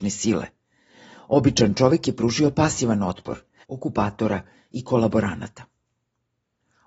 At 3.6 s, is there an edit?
yes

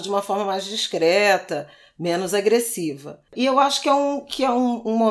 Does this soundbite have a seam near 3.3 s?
yes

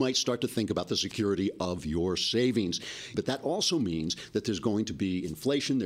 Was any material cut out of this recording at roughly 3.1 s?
yes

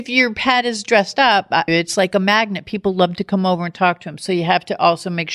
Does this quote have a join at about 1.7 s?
yes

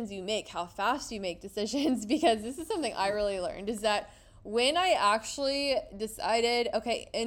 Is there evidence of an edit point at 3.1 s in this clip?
no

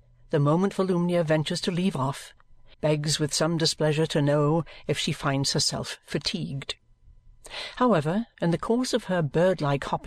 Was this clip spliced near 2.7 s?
yes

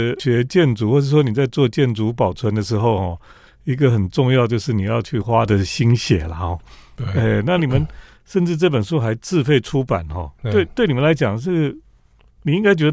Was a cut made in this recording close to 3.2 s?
no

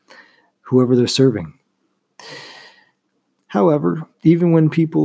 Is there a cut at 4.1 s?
yes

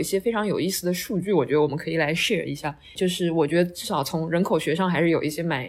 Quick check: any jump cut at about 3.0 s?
yes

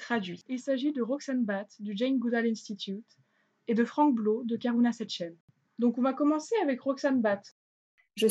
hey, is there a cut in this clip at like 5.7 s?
yes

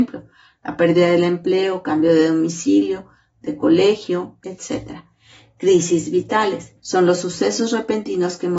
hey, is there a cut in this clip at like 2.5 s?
no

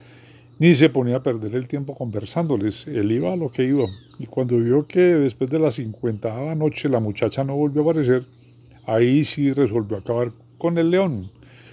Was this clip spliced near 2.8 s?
no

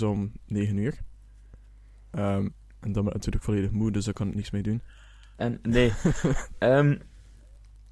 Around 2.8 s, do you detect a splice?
no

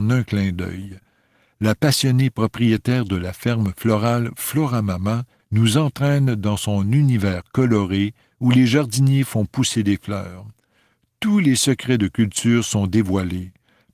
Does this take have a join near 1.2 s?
no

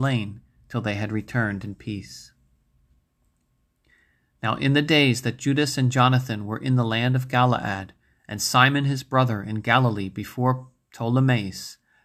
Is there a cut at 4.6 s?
no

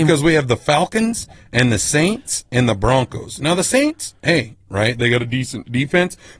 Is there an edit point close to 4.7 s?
yes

